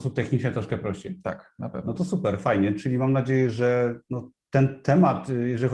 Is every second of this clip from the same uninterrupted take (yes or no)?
yes